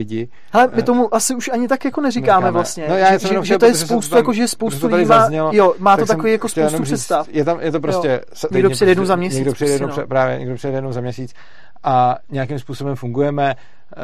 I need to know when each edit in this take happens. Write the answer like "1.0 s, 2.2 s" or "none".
8.5 s